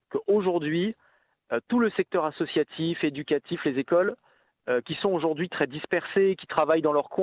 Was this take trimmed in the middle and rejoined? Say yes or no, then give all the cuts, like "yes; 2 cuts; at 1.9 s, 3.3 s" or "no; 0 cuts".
no; 0 cuts